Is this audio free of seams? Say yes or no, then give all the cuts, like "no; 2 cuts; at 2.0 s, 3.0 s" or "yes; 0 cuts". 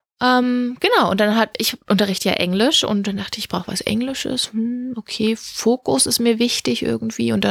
no; 1 cut; at 1.5 s